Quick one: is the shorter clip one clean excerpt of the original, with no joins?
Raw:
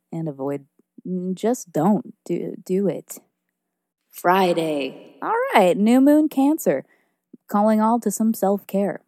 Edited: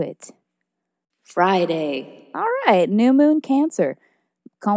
yes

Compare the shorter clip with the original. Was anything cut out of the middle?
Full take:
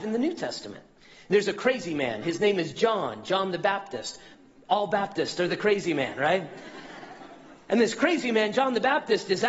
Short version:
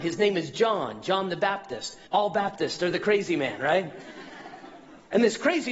yes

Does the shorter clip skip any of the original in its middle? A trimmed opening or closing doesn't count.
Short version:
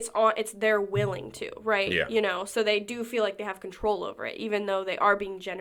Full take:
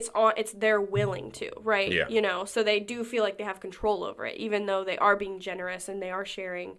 no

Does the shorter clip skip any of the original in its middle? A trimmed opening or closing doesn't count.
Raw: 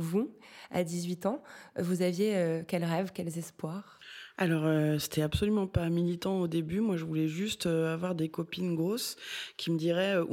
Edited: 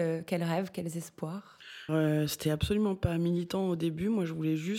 yes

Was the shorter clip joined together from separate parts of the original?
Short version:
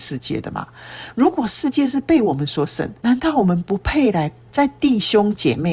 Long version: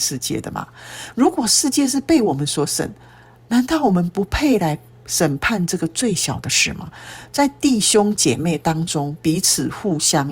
yes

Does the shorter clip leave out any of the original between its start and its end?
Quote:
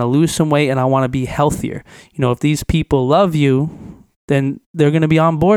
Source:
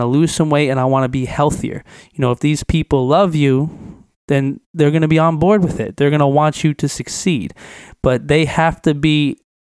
no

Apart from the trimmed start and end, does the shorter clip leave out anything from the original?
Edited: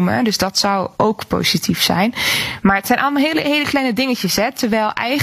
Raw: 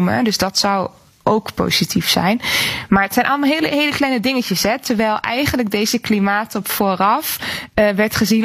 yes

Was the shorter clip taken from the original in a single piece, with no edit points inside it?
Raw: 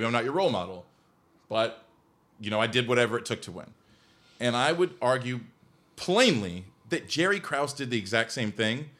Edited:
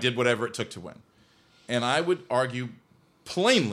yes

